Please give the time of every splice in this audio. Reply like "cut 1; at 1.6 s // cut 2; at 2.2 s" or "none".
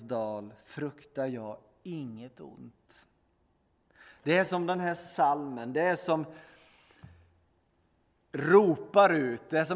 none